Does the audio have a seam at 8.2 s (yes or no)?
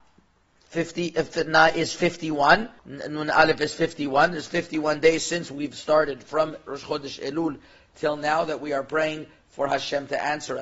no